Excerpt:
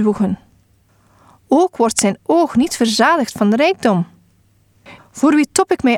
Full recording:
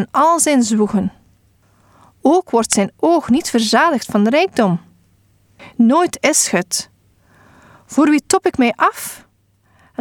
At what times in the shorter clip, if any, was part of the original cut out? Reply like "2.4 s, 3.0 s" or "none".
5.0 s